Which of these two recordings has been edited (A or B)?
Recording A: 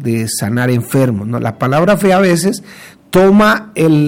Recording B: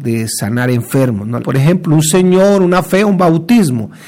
B